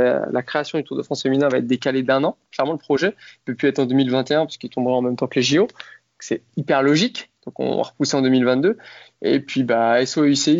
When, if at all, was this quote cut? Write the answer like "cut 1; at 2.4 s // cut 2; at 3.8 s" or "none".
none

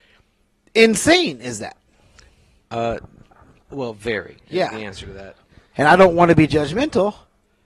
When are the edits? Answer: cut 1; at 5.7 s

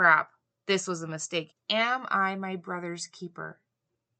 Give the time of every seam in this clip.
cut 1; at 1.5 s

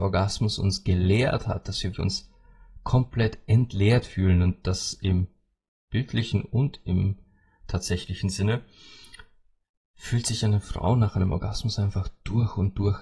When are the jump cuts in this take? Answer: cut 1; at 1.9 s

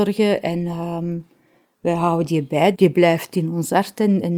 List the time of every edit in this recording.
cut 1; at 2.7 s

